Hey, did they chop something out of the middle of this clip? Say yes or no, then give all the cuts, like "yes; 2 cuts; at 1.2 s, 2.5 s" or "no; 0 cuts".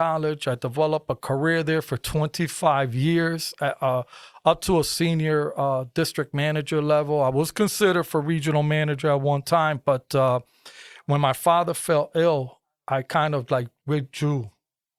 no; 0 cuts